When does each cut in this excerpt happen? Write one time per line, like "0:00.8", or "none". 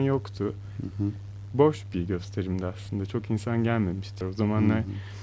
0:01.5
0:04.2